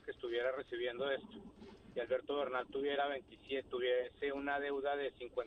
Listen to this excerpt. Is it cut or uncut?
cut